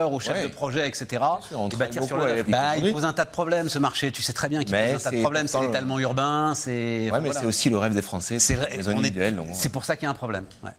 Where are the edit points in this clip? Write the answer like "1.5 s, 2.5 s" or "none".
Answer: 2.5 s